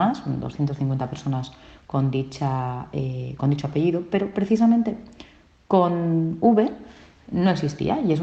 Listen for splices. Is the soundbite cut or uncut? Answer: cut